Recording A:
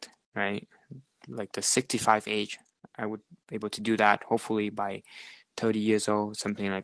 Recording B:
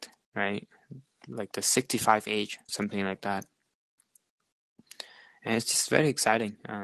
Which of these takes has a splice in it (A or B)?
B